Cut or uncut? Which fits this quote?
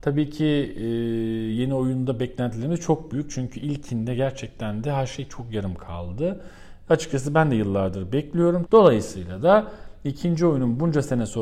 cut